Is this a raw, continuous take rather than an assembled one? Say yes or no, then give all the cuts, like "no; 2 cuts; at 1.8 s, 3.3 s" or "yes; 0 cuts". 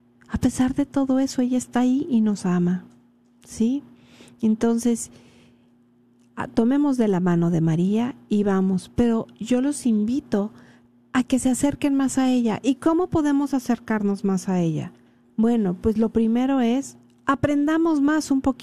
yes; 0 cuts